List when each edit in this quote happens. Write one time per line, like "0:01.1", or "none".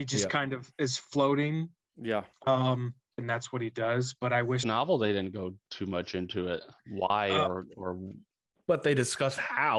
0:03.2
0:04.6